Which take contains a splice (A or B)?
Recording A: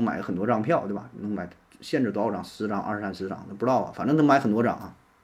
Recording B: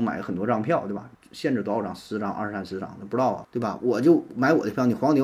B